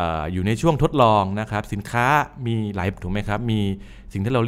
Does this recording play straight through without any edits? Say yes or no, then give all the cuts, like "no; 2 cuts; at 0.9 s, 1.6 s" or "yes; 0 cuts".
no; 1 cut; at 2.9 s